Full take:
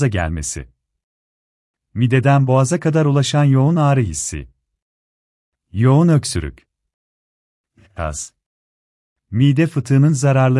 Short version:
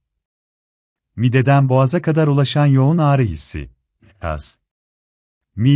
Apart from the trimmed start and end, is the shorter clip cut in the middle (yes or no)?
yes